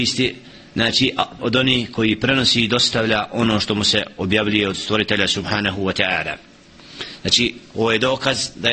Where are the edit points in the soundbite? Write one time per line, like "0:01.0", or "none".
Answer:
0:01.4